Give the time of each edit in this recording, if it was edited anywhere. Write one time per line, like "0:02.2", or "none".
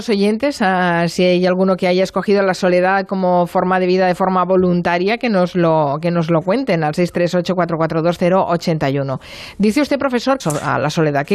0:10.4